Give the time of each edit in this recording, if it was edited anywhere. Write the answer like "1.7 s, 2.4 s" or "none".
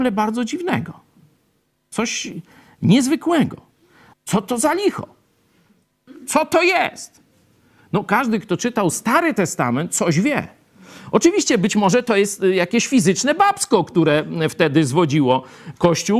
4.1 s